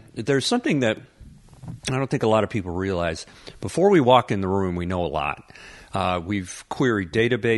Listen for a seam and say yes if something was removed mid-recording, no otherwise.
no